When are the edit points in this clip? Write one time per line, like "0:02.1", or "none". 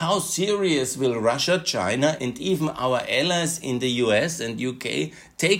0:02.2